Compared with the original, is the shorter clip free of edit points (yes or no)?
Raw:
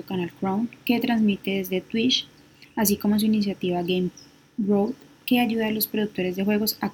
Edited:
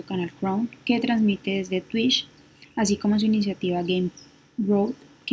yes